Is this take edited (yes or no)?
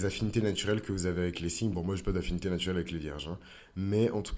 no